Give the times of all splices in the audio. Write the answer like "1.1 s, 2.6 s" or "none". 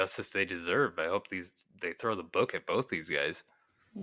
none